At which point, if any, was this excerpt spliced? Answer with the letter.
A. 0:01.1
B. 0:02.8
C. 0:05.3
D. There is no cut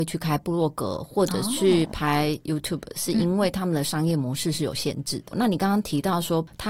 C